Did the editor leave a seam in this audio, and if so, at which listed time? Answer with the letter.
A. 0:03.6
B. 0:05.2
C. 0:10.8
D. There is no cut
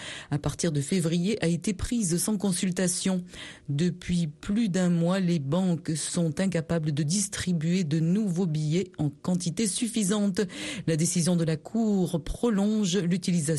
D